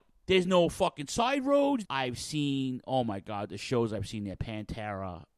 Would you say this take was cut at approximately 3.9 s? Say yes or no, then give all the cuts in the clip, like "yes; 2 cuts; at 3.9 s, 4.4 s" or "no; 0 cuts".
no; 1 cut; at 1.8 s